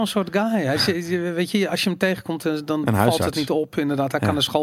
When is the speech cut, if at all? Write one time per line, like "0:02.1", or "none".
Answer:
none